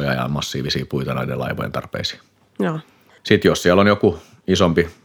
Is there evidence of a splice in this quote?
yes; 1 cut; at 3.2 s

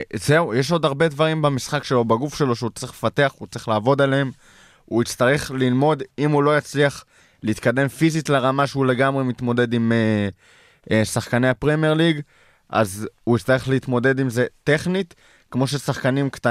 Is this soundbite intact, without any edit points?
yes; 0 cuts

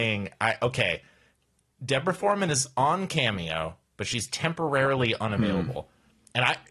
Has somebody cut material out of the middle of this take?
no; 0 cuts

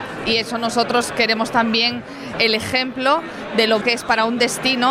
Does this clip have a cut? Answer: yes; 2 cuts; at 2.3 s, 3.8 s

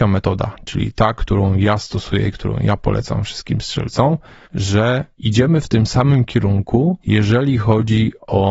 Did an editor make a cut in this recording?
yes; 2 cuts; at 4.4 s, 7.0 s

